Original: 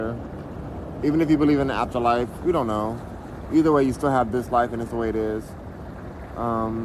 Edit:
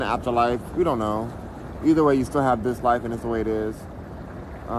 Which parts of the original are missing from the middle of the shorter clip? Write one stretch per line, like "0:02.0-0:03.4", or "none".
none